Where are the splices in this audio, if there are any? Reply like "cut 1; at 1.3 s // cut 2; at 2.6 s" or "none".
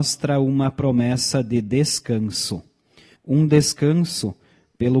cut 1; at 3.1 s